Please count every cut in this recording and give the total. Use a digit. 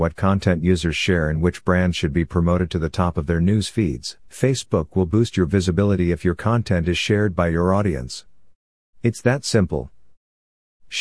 1